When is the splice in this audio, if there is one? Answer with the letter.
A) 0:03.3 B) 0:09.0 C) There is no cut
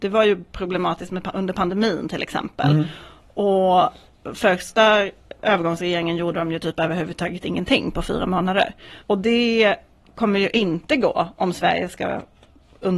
B